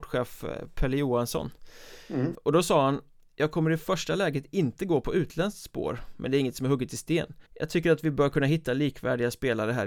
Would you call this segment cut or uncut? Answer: cut